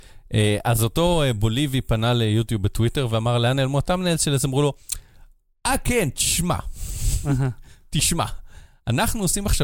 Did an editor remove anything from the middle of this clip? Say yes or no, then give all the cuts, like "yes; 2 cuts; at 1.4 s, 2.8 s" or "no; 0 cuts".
no; 0 cuts